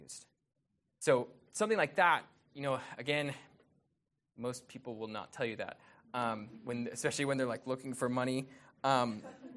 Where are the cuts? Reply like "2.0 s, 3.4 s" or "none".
none